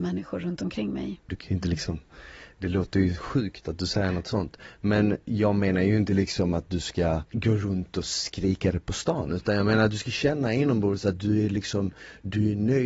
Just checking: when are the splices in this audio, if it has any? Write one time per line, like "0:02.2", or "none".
0:01.3